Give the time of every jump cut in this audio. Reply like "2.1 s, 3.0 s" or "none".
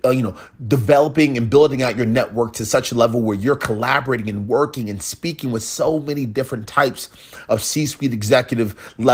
none